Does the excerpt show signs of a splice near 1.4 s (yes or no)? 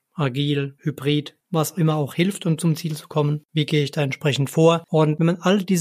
no